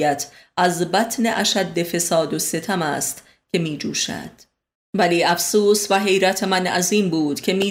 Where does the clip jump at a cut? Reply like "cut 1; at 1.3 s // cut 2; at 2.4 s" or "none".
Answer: cut 1; at 4.7 s